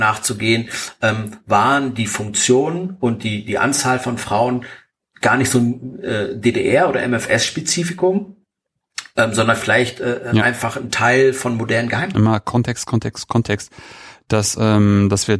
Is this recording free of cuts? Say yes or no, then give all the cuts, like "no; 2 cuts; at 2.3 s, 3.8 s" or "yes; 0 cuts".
no; 1 cut; at 12.1 s